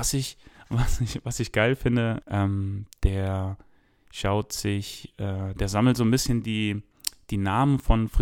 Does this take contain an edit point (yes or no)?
yes